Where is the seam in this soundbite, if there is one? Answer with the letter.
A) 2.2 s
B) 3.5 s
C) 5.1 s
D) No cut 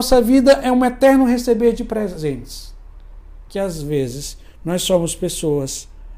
D